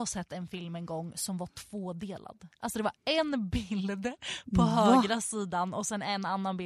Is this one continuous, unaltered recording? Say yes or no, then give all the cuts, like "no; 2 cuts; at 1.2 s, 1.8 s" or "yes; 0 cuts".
yes; 0 cuts